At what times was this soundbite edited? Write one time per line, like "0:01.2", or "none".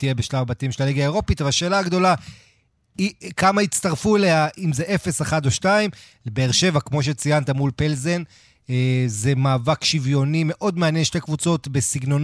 none

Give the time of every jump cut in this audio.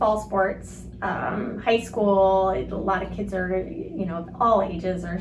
none

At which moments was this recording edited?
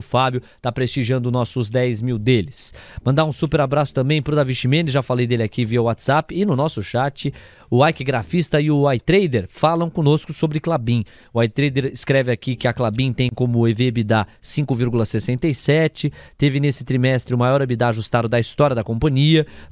none

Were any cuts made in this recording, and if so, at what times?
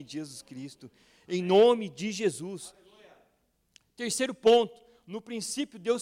none

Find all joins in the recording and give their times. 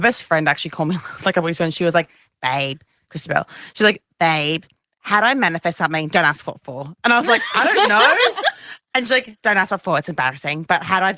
none

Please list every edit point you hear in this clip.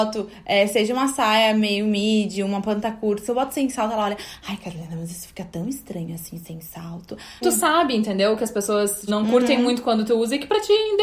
0:07.4
0:09.1

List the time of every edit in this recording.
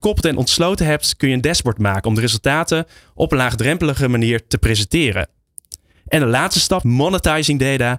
0:06.8

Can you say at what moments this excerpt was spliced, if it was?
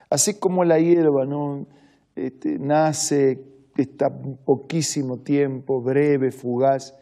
none

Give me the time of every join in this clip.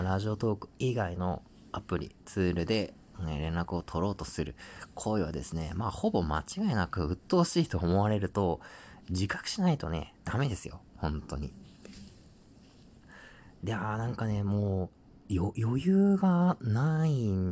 none

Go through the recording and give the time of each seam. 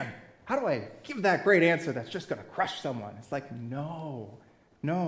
none

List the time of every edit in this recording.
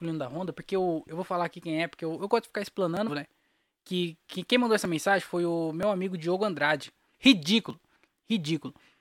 0:03.1
0:07.1

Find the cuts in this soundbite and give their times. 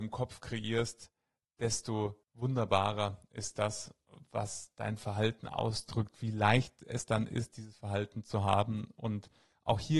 0:02.2

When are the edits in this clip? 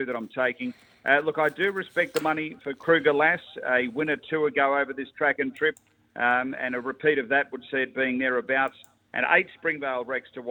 none

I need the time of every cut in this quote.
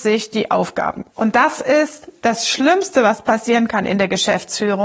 0:01.1

